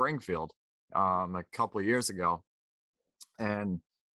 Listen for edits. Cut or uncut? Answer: uncut